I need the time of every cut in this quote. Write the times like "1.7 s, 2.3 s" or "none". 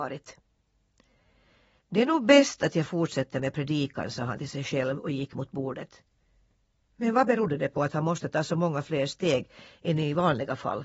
none